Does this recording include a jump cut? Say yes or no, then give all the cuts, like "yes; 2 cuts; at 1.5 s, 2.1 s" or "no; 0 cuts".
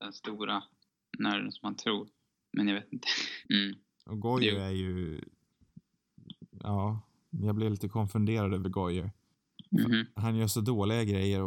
yes; 2 cuts; at 3.4 s, 9.7 s